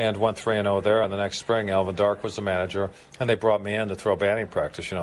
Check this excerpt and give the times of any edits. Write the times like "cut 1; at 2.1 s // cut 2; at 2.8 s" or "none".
none